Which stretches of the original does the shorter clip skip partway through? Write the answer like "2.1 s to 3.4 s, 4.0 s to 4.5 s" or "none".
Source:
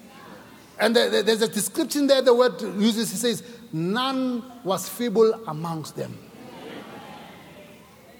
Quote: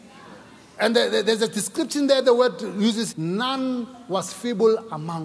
3.1 s to 3.7 s

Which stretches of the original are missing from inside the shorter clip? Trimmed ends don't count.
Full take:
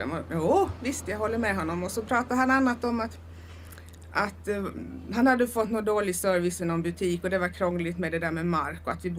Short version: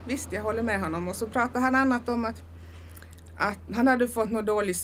4.4 s to 5.1 s

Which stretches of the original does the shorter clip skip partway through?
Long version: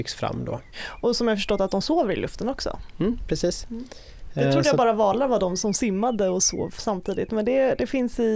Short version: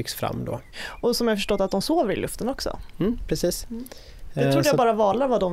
none

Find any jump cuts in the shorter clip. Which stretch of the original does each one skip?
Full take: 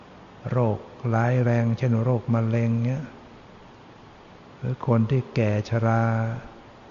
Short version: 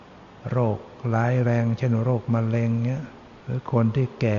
3.4 s to 4.6 s

